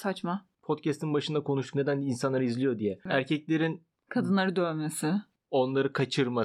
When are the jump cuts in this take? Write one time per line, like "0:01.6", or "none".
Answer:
0:03.1
0:05.4